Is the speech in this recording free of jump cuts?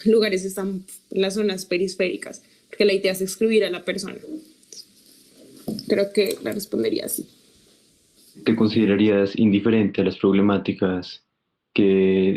yes; 0 cuts

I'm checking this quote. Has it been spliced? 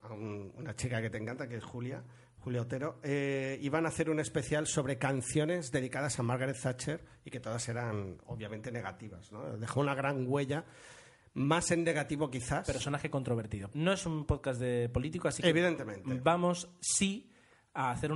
yes; 1 cut; at 13.7 s

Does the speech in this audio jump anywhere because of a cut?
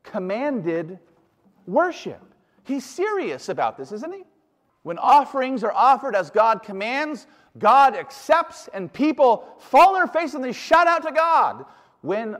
yes; 1 cut; at 4.7 s

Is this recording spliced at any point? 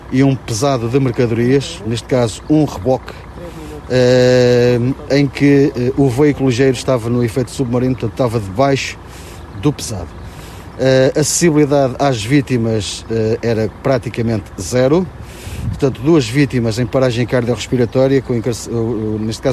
no; 0 cuts

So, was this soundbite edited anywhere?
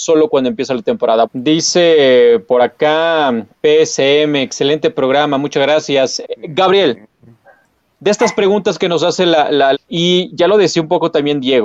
yes; 3 cuts; at 1.2 s, 6.2 s, 9.7 s

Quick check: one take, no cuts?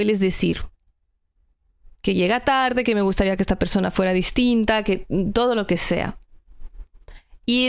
yes; 0 cuts

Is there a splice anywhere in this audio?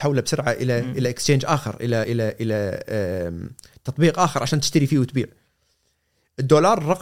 no; 0 cuts

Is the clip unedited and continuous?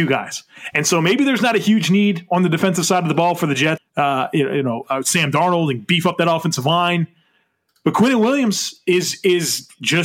no; 1 cut; at 3.8 s

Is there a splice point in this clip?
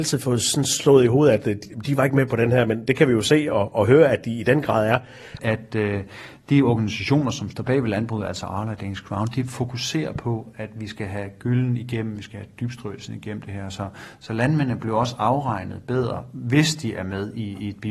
yes; 1 cut; at 5.4 s

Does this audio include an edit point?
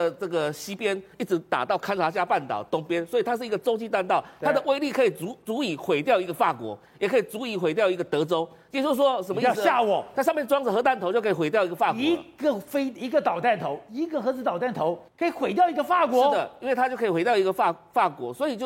yes; 1 cut; at 15.1 s

